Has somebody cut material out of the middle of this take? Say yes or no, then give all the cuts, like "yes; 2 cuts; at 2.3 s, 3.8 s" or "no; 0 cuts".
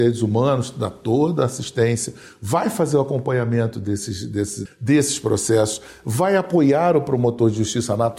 yes; 1 cut; at 4.6 s